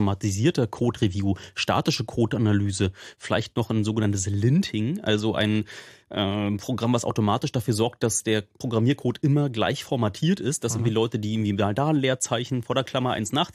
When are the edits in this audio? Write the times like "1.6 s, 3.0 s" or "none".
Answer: none